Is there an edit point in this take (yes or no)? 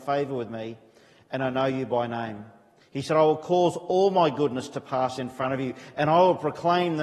yes